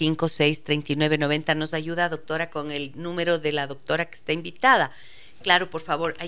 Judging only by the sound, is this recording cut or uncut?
uncut